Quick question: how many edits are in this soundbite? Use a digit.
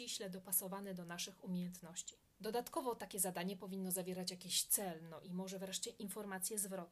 1